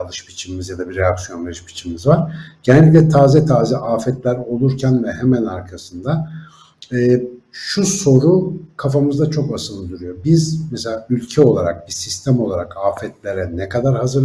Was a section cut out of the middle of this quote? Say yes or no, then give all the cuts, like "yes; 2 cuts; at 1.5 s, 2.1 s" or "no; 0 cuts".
no; 0 cuts